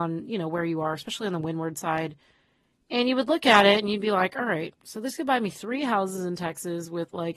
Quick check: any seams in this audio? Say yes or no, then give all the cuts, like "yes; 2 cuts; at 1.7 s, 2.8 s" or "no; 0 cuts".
no; 0 cuts